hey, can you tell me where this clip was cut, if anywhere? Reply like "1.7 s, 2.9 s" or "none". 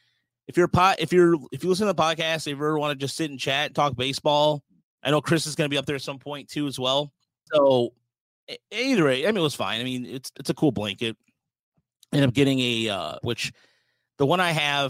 7.5 s, 13.2 s